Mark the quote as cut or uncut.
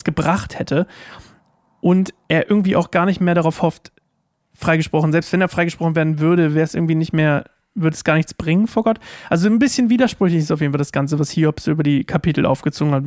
uncut